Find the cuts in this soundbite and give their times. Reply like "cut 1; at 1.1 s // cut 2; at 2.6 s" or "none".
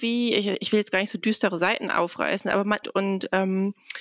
cut 1; at 2.8 s

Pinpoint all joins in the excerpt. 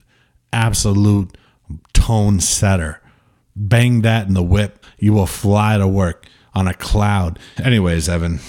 cut 1; at 4.8 s // cut 2; at 7.6 s

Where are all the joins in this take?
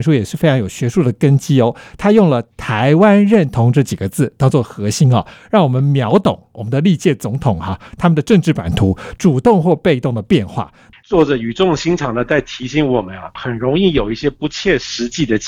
cut 1; at 10.9 s // cut 2; at 13.4 s

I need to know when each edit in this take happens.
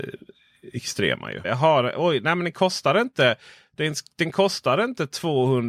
cut 1; at 1.4 s

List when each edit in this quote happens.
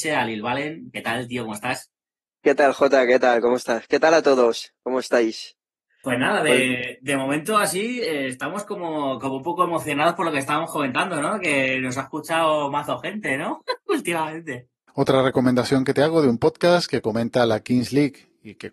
none

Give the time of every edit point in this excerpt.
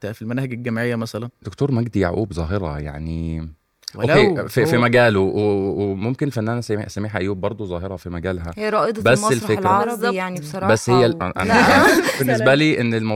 cut 1; at 11.2 s // cut 2; at 12.2 s

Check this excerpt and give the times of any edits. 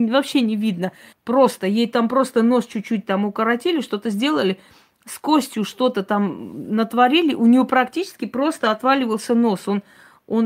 cut 1; at 1.1 s

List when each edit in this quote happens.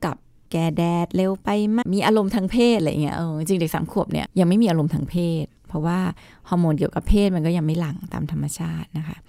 cut 1; at 1.8 s // cut 2; at 4.3 s

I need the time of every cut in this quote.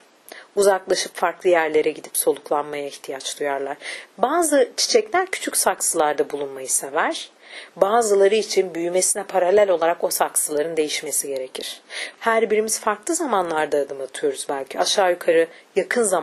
cut 1; at 4.1 s // cut 2; at 12.2 s

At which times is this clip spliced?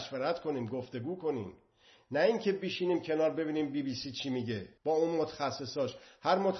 cut 1; at 4.8 s

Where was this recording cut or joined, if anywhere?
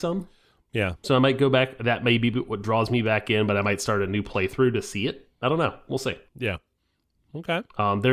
cut 1; at 6.3 s

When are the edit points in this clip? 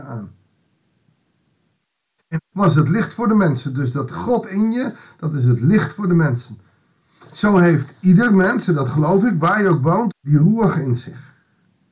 cut 1; at 2.5 s // cut 2; at 10.1 s

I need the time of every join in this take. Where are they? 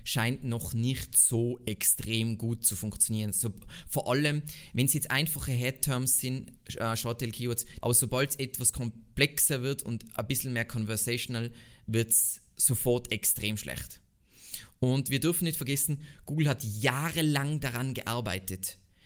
cut 1; at 7.8 s

